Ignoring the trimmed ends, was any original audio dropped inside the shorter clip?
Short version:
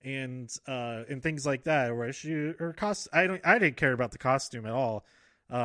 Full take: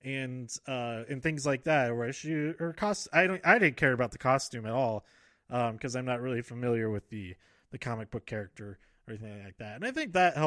no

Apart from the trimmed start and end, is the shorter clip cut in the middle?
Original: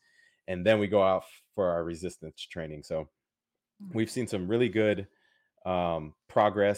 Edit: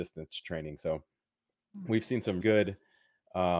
yes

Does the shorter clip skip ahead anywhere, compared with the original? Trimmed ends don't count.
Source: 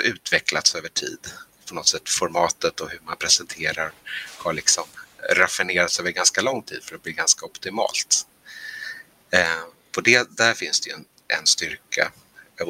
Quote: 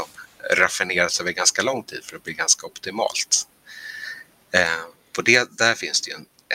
no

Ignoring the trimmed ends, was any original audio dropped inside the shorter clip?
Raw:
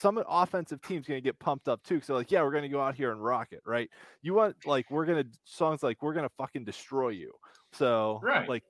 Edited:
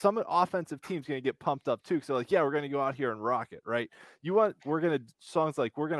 yes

